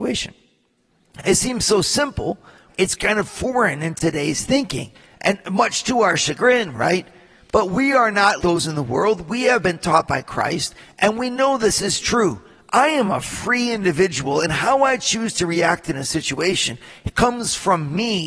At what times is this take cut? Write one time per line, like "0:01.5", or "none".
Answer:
0:02.7
0:08.4